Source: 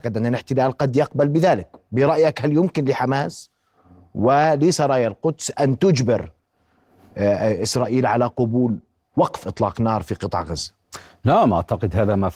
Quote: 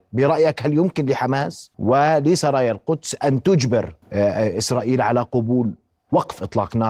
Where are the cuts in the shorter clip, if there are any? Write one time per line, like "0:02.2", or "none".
0:01.7
0:04.0